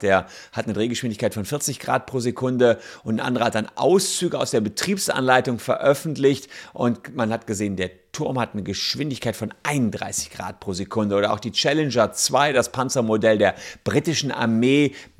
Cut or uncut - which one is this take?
uncut